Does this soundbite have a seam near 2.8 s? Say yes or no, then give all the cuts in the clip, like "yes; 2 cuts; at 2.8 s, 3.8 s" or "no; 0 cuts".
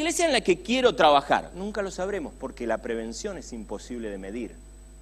no; 1 cut; at 1.5 s